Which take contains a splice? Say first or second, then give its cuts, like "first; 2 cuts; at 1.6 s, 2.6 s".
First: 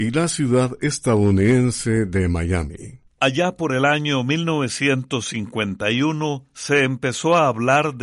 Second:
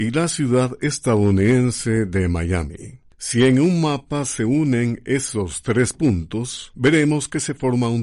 first; 1 cut; at 3.1 s